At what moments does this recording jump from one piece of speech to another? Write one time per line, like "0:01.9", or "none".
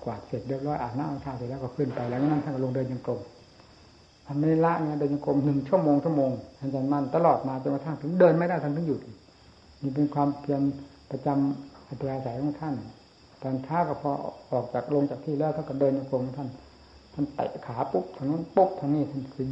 0:06.6